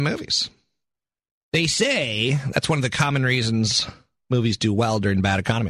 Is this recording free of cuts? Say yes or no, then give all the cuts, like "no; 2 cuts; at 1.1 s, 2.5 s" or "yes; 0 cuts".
yes; 0 cuts